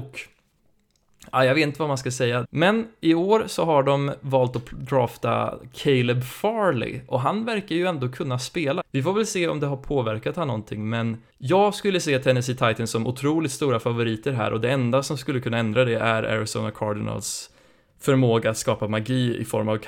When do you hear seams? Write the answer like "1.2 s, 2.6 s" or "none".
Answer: 2.4 s, 8.8 s, 11.3 s